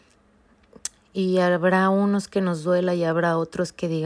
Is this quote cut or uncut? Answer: uncut